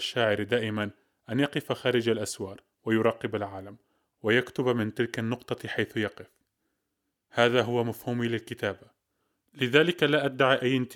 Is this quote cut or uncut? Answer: uncut